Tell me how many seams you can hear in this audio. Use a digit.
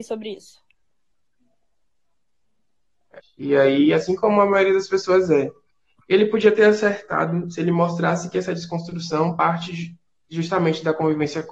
1